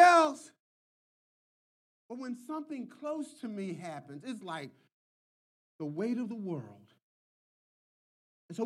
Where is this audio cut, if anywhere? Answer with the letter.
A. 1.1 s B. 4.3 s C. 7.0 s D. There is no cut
D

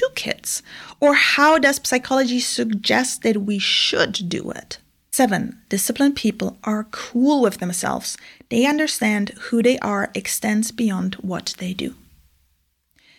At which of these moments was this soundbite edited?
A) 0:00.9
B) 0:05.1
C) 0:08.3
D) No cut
B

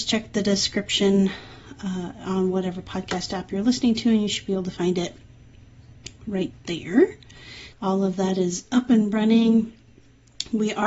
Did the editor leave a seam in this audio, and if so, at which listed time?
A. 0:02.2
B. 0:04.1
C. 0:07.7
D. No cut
C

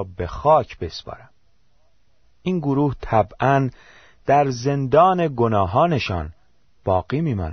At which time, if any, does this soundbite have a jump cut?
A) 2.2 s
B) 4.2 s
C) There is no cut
A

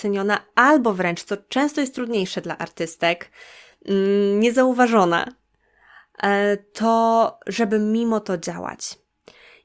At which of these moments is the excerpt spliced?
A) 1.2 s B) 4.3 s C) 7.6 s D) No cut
D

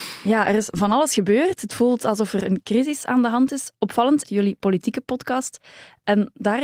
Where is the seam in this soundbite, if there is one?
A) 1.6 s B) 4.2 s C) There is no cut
B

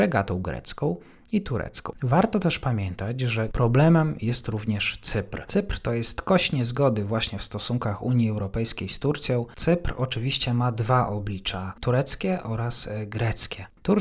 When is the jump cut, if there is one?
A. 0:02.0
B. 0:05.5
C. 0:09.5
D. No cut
D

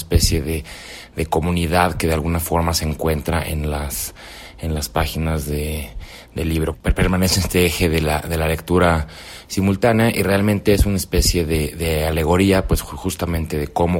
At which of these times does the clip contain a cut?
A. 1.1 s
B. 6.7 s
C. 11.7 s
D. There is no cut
B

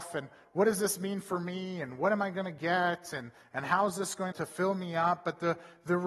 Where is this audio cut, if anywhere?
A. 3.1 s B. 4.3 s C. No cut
B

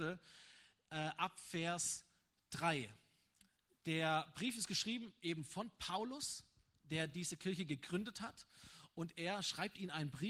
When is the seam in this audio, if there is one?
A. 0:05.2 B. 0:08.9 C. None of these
C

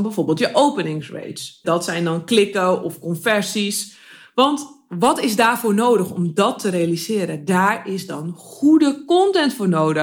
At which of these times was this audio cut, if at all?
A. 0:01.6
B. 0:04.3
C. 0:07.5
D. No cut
A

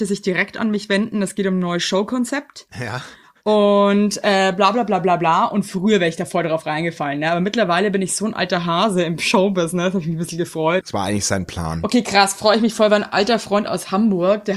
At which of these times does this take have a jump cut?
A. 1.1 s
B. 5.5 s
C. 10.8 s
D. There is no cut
C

